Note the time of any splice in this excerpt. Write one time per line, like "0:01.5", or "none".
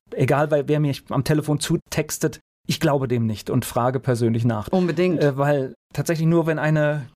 0:04.7

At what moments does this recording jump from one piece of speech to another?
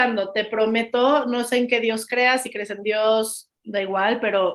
none

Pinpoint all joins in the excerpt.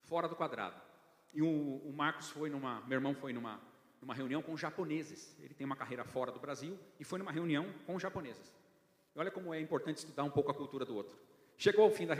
none

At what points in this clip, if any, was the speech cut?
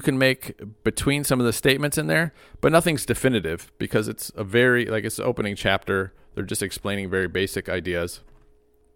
none

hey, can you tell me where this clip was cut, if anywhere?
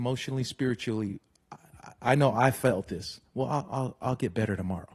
none

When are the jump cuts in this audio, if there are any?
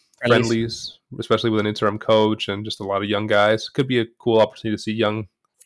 none

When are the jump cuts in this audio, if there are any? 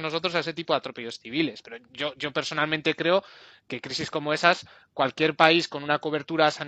none

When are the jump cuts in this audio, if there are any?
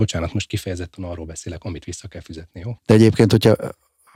0:02.8

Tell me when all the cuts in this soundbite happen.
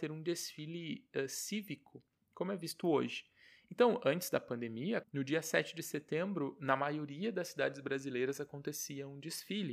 0:05.0

